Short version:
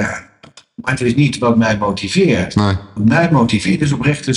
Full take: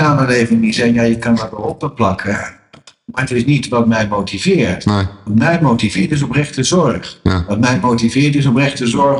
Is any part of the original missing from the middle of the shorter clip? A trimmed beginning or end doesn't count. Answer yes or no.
no